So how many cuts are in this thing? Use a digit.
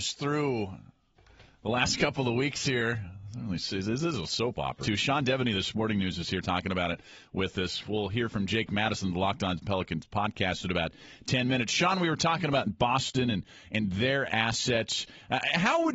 1